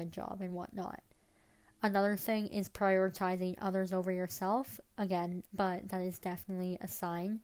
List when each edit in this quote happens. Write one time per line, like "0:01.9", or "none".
0:05.5